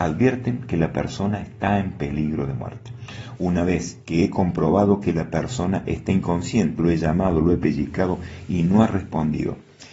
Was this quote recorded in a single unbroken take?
no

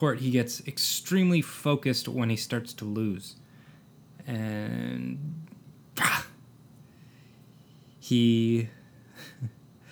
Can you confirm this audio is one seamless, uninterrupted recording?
yes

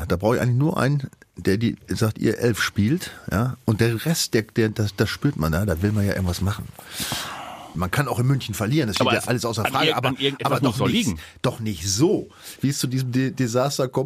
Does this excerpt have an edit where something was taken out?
yes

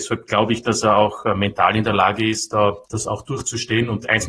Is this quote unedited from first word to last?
no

